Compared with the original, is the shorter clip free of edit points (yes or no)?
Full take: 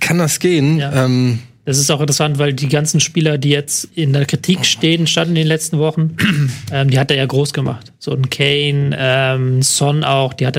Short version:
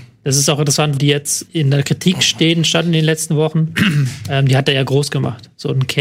no